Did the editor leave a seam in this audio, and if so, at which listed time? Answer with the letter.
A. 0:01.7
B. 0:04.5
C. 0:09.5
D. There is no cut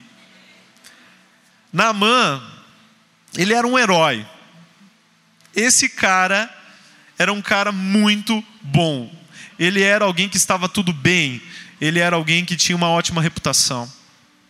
C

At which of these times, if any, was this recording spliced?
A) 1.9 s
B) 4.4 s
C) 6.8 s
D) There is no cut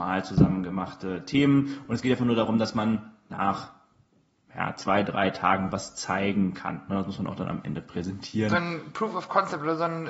D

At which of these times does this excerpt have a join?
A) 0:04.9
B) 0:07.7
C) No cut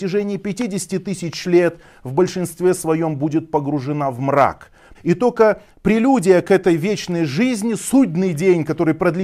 A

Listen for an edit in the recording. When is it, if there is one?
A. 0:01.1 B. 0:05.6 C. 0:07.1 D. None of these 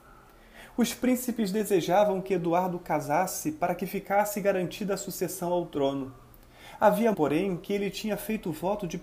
C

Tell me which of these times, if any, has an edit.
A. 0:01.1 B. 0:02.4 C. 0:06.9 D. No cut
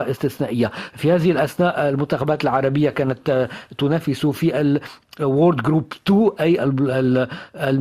D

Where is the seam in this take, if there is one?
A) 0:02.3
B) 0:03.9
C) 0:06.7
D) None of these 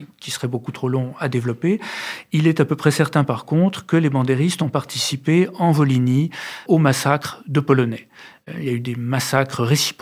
C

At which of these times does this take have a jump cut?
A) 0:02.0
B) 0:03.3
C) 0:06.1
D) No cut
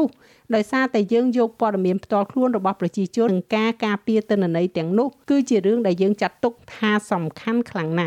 B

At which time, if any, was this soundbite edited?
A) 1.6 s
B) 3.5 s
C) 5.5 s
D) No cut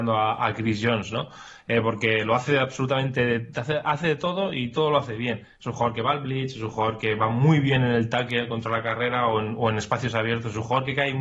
D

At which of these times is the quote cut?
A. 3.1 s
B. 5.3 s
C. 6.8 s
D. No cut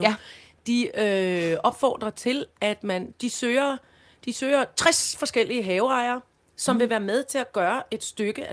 A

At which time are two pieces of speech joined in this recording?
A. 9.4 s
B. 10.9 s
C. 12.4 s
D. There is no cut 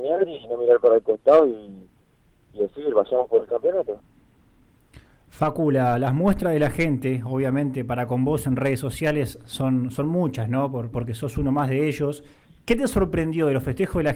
B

